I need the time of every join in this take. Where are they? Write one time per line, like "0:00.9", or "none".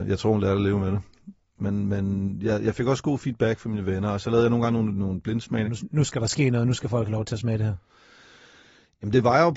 0:01.6
0:05.6